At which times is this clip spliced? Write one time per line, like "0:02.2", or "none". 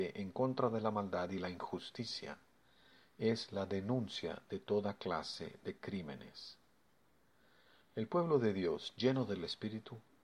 none